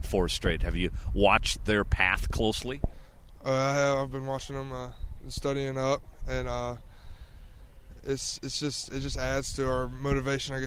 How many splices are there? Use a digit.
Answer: 1